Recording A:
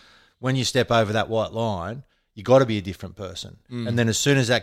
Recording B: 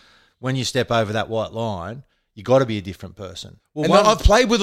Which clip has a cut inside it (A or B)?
B